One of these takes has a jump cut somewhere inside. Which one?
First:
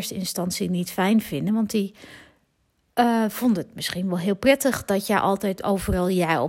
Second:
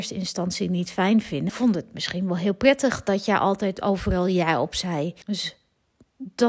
second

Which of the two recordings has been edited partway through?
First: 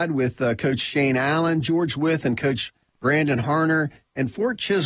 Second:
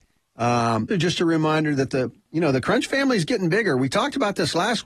second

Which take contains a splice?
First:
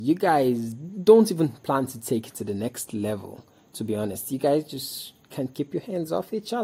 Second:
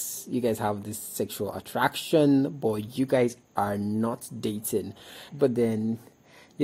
second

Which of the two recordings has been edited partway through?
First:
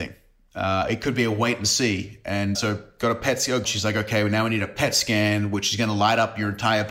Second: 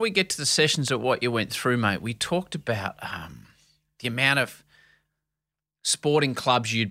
first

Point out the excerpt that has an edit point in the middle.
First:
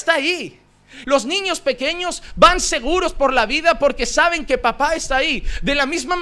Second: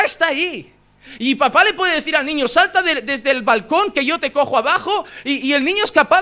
first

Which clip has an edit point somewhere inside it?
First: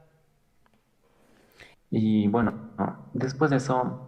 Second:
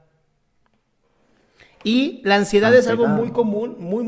first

